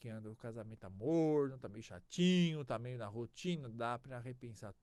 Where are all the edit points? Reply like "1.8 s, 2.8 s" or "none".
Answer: none